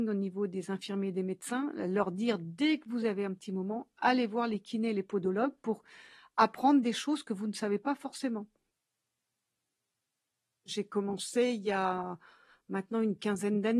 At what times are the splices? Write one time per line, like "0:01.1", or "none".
none